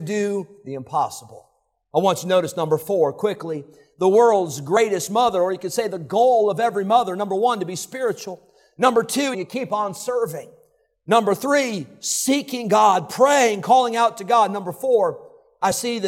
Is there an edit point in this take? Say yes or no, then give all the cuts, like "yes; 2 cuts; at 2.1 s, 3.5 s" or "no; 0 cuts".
yes; 1 cut; at 9.3 s